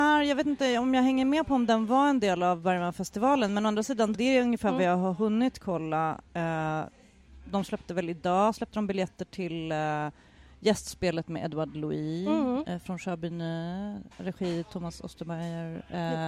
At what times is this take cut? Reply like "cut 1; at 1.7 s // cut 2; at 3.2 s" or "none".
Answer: cut 1; at 4.1 s